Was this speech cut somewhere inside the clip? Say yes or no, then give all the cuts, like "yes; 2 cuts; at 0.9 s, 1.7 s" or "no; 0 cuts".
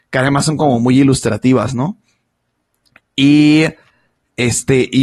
no; 0 cuts